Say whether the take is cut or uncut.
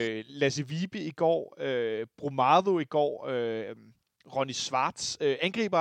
uncut